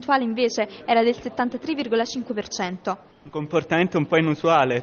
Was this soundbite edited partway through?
yes; 1 cut; at 3.1 s

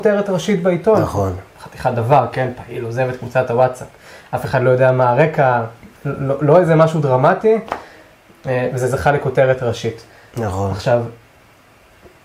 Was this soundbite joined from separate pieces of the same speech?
yes; 1 cut; at 5.9 s

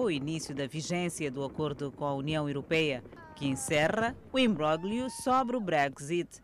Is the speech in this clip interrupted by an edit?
yes; 1 cut; at 4.3 s

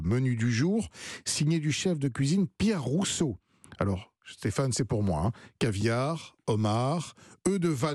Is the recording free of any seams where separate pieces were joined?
no; 1 cut; at 4.2 s

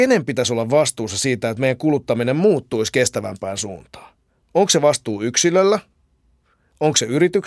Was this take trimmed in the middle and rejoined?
no; 0 cuts

